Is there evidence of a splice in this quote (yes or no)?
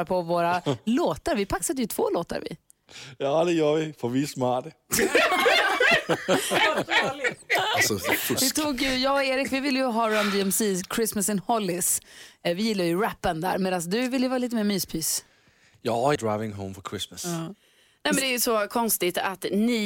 yes